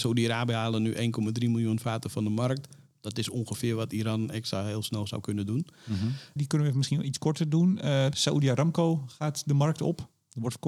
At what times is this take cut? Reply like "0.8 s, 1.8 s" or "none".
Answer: 6.4 s, 8.1 s